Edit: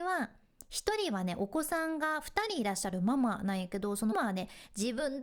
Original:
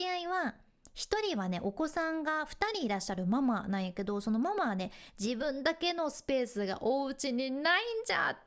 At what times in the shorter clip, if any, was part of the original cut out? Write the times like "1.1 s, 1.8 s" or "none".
4.1 s